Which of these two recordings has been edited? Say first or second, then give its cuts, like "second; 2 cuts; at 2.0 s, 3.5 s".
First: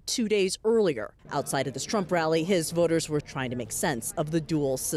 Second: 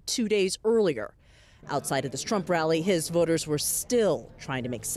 first; 2 cuts; at 1.2 s, 3.2 s